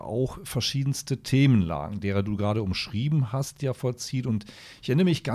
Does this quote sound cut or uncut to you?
uncut